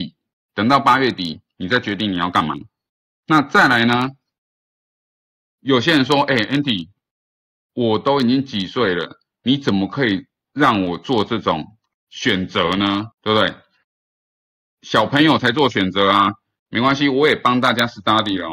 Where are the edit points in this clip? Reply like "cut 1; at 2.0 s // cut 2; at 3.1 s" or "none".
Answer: cut 1; at 13.1 s // cut 2; at 16.7 s